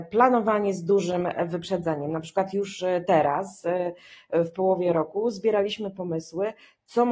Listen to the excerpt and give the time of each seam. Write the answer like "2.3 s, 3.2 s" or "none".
none